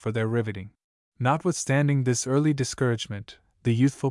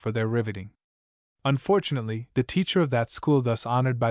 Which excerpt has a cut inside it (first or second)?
first